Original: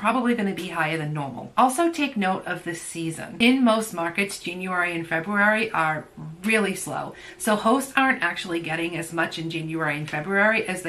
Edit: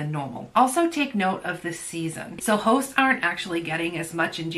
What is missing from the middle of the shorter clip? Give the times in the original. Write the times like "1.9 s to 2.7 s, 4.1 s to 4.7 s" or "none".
3.4 s to 7.3 s